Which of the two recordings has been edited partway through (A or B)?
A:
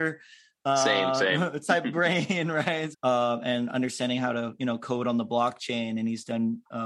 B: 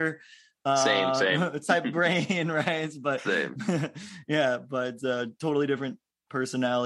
A